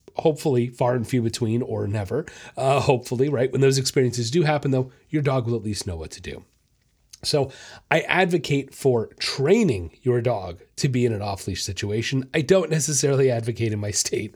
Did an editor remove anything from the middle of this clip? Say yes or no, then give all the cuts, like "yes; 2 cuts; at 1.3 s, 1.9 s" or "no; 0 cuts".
no; 0 cuts